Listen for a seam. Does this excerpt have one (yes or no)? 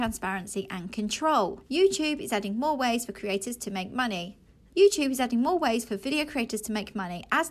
yes